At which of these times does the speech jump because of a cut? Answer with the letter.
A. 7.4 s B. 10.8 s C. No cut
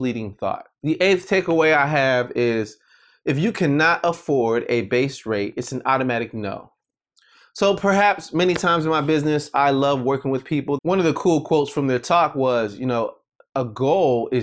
B